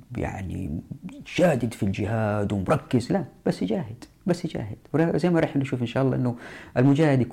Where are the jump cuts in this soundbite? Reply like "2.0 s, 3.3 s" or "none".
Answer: none